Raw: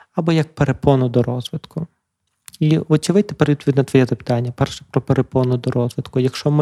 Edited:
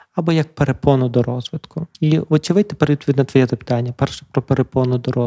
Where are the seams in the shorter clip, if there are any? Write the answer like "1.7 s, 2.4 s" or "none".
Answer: 1.9 s